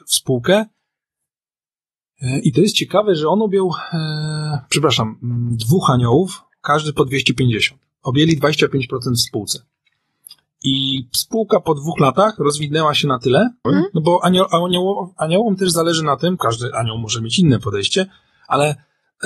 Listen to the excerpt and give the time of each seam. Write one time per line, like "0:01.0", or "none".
0:13.6
0:16.4

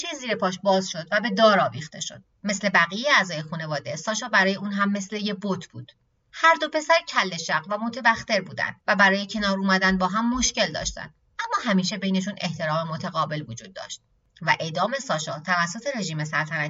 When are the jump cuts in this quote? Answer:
0:02.4

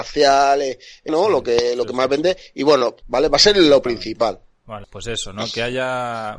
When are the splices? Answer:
0:01.1
0:03.0
0:04.8

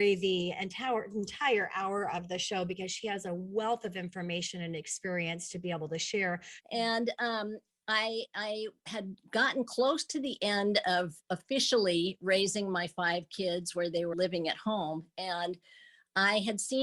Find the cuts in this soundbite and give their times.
0:06.6
0:14.1

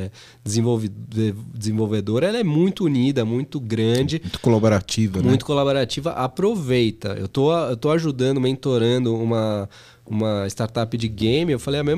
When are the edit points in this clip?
none

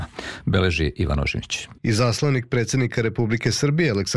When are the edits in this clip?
0:01.8

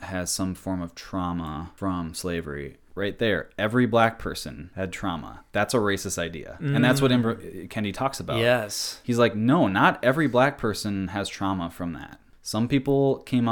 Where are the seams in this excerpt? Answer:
none

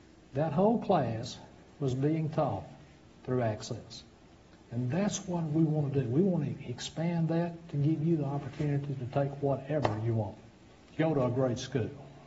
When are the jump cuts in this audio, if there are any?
0:11.0

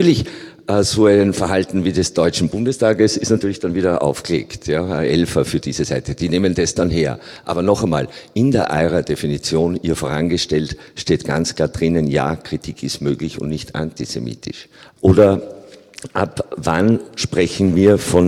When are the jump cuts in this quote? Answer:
0:15.0

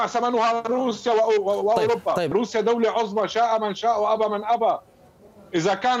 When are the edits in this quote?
0:02.3

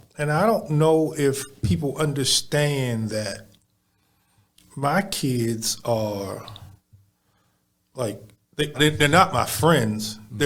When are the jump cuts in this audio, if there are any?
0:08.7

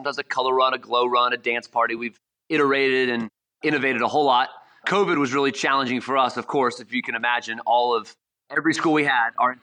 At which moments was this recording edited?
none

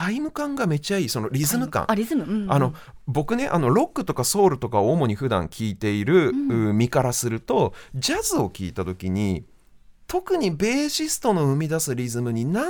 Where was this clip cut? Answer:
none

